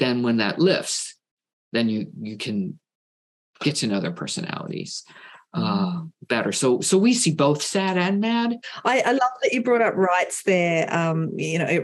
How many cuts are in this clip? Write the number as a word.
zero